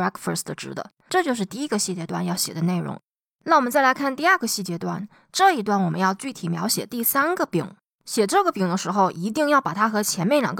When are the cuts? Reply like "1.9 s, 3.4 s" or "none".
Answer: none